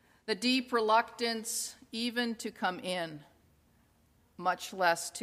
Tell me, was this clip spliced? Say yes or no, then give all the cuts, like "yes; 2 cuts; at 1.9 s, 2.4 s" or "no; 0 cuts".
no; 0 cuts